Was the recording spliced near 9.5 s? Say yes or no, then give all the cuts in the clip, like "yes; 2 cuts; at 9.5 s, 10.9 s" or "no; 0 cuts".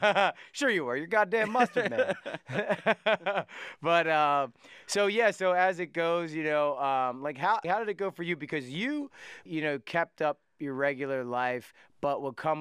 yes; 2 cuts; at 7.6 s, 9.5 s